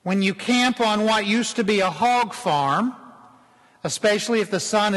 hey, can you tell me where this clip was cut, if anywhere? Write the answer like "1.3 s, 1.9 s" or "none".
none